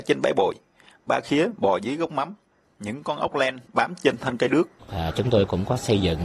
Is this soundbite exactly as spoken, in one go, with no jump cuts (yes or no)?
no